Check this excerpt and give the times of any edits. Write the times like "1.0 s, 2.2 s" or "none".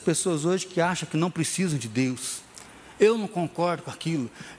2.9 s